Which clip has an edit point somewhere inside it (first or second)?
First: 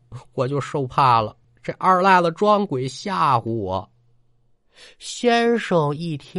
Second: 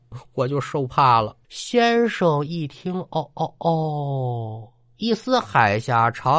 second